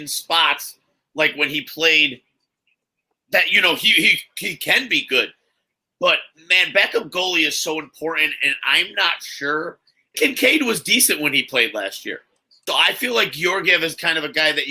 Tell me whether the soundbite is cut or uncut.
cut